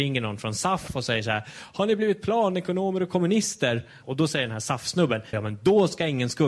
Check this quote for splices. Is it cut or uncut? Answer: cut